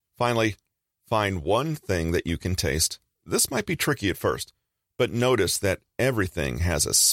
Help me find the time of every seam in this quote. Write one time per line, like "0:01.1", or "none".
0:03.1